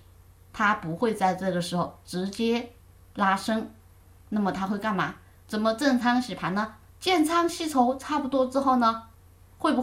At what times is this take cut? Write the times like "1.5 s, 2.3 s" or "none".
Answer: 5.3 s, 6.9 s